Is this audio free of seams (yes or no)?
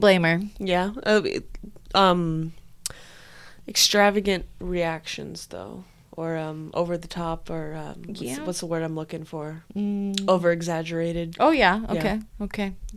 yes